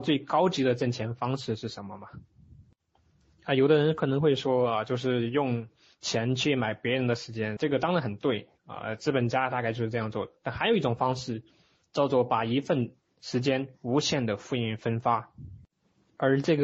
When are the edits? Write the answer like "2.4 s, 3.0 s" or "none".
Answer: 7.6 s

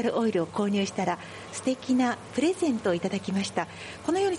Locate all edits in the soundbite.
none

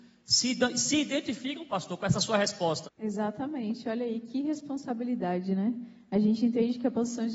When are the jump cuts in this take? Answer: 2.8 s

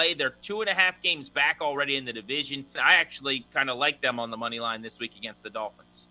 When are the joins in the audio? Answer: 2.8 s

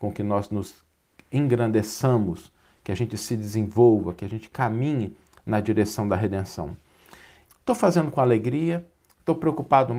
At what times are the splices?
7.5 s

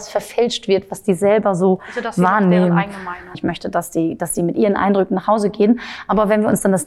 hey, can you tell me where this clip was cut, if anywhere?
3.3 s

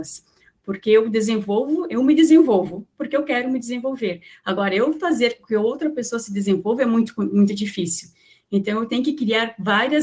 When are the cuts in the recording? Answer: none

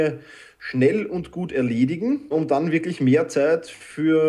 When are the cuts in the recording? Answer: 2.3 s

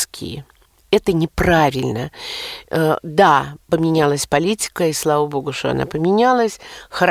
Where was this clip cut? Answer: none

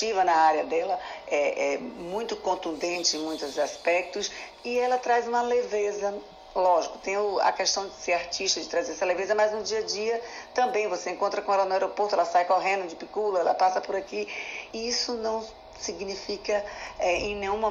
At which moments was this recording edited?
14.7 s

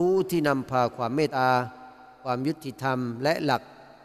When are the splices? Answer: 1.3 s

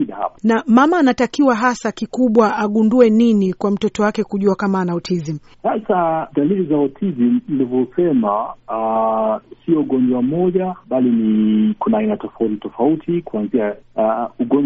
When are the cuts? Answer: 6.3 s

